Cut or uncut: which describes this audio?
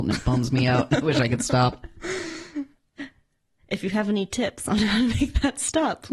uncut